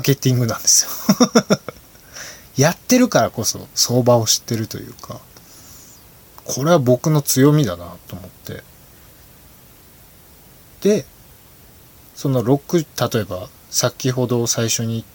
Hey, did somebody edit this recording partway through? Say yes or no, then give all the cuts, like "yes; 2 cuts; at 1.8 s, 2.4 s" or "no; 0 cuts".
no; 0 cuts